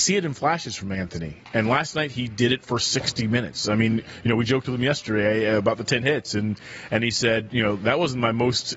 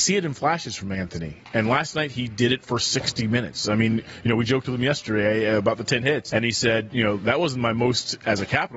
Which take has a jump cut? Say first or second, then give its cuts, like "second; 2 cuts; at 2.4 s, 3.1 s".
second; 1 cut; at 6.3 s